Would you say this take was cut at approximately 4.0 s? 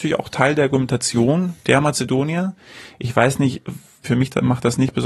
yes; 1 cut; at 4.0 s

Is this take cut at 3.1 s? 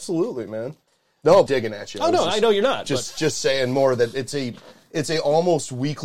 no; 1 cut; at 1.5 s

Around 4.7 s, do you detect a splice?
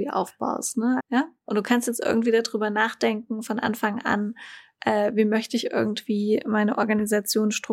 no; 1 cut; at 1.0 s

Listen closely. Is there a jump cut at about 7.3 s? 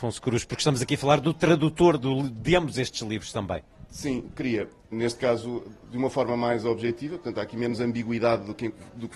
no; 1 cut; at 4.9 s

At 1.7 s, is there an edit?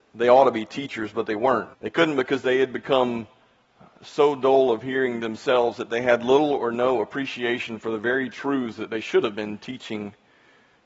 yes; 1 cut; at 1.7 s

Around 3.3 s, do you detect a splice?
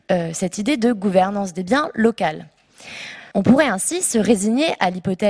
yes; 1 cut; at 3.3 s

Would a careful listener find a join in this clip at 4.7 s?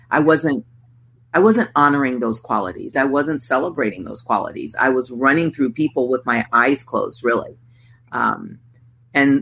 no; 1 cut; at 2.9 s

